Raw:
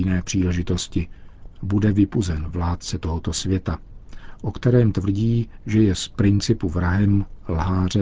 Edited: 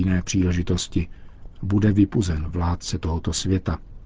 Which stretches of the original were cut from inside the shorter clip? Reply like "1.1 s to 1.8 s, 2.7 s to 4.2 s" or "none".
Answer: none